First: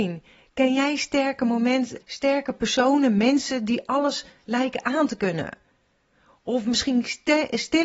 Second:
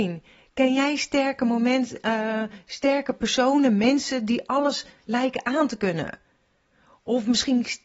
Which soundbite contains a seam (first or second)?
first